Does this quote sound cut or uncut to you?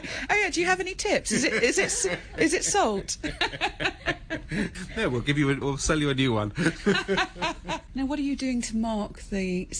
cut